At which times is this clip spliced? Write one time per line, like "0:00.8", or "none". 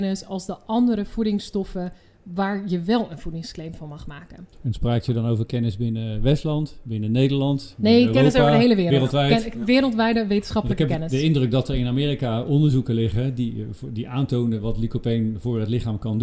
none